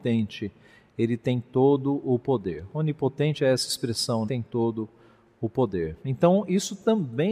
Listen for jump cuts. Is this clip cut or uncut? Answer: cut